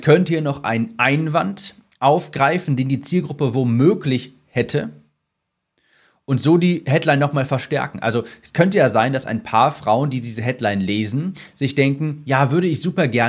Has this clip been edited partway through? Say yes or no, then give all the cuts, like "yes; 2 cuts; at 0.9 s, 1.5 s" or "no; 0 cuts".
no; 0 cuts